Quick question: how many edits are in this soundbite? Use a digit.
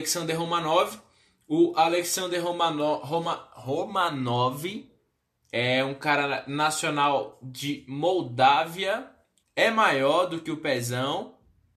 1